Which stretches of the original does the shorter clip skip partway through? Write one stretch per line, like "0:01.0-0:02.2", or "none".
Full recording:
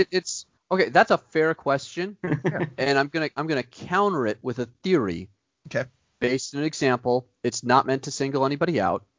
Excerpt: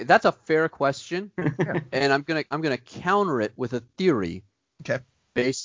none